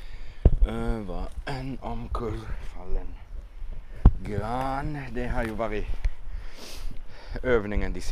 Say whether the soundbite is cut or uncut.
uncut